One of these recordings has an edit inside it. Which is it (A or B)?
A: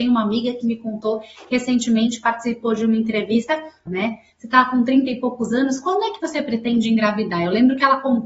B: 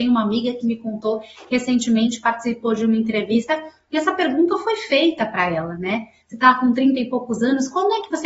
A